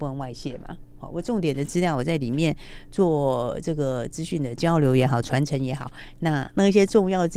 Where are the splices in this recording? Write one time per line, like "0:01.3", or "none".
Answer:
none

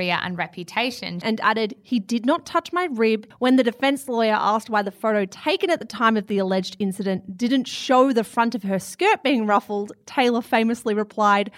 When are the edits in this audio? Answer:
0:01.2
0:03.3

